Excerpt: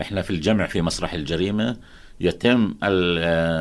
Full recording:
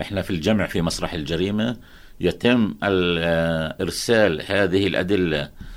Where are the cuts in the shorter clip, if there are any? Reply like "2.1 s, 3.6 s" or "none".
none